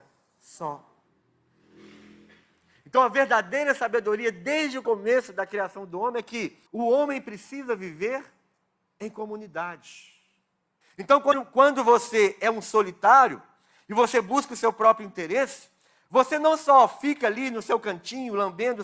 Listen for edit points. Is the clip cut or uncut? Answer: cut